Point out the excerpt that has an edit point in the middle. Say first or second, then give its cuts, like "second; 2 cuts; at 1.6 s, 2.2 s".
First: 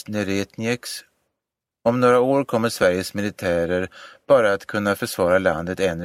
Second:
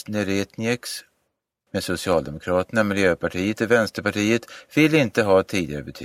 second; 1 cut; at 1.7 s